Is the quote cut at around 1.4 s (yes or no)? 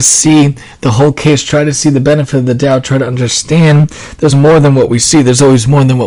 no